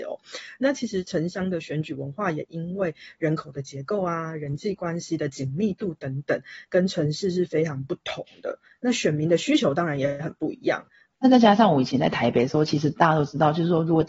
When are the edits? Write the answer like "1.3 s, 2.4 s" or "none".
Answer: 11.1 s